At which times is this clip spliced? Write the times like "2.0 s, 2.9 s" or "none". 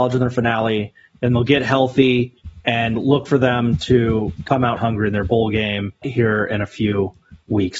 4.8 s, 6.0 s